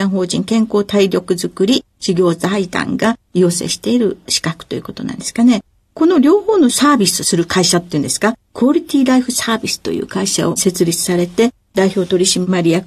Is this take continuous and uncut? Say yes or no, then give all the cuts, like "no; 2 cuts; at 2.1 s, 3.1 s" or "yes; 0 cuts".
yes; 0 cuts